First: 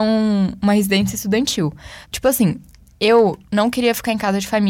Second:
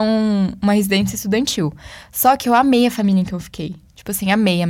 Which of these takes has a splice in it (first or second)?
first